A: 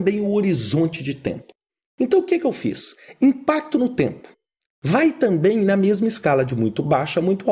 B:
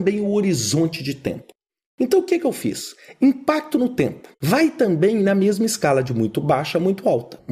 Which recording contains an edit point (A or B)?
B